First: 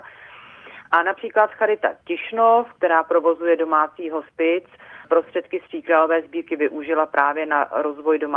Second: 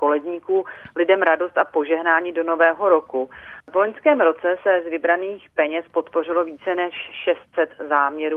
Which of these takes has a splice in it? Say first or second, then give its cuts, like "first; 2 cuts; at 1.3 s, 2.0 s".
second; 1 cut; at 3.6 s